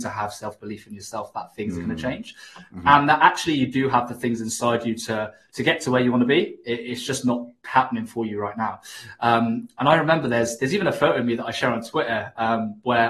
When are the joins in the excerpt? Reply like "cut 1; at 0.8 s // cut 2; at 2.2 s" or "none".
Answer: none

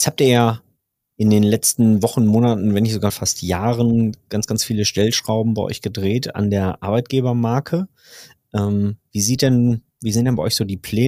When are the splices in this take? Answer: cut 1; at 3.1 s

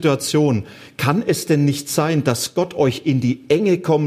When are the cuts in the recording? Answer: none

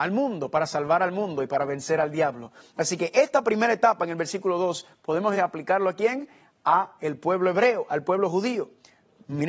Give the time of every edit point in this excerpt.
cut 1; at 5.4 s

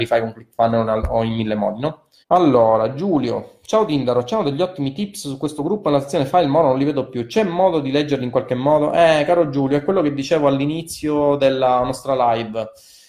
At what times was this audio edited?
cut 1; at 2.2 s

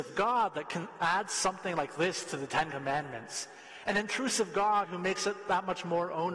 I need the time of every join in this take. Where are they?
none

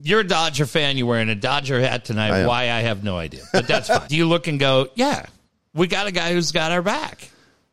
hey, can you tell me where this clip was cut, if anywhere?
cut 1; at 4.1 s

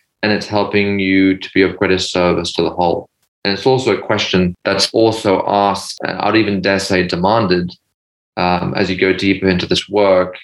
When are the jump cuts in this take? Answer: none

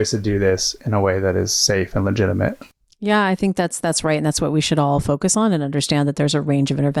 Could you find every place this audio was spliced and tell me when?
none

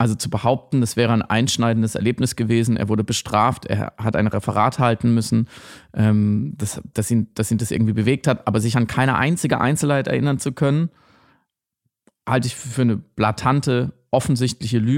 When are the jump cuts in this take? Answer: cut 1; at 6.9 s

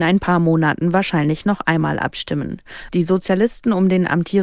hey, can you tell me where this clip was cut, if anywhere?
cut 1; at 2.9 s

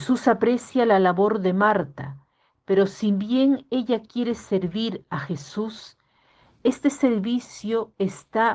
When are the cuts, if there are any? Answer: none

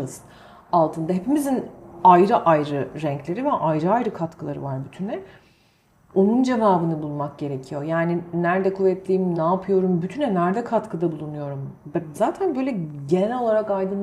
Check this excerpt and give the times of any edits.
cut 1; at 9.3 s // cut 2; at 12.1 s

